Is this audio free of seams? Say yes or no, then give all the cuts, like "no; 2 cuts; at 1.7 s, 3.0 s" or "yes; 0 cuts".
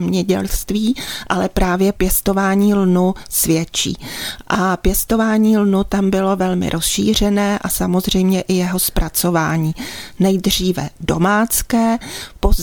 yes; 0 cuts